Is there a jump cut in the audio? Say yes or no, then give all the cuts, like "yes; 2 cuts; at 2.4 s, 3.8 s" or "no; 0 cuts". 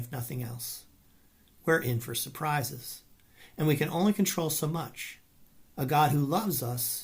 yes; 1 cut; at 5.7 s